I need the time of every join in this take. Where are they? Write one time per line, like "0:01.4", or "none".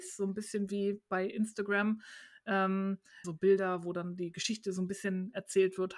0:03.2